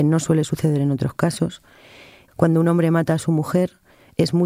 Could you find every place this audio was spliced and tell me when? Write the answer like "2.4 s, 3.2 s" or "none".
2.3 s

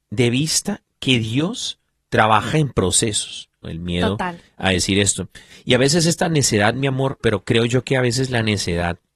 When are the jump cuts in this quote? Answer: 3.6 s, 7.2 s

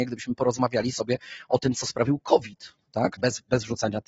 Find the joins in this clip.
3.2 s

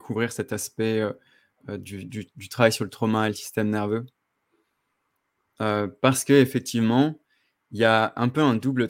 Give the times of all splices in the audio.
none

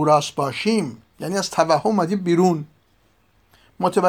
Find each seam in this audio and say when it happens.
1.1 s

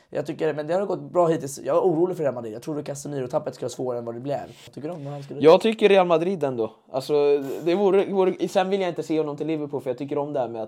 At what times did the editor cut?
4.7 s

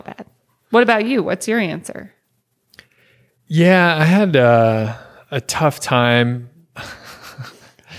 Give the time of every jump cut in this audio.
none

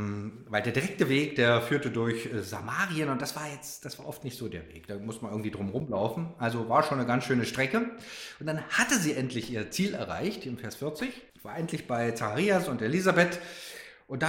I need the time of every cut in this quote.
11.3 s

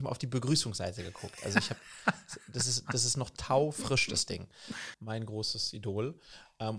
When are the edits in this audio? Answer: 4.9 s

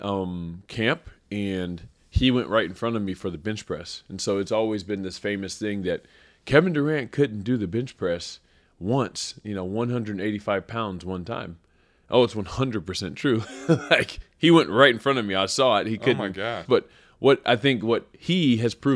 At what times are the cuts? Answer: 16.7 s

